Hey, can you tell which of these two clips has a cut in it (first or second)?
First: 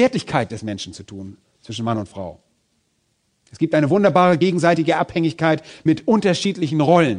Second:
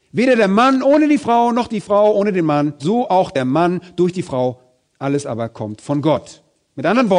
second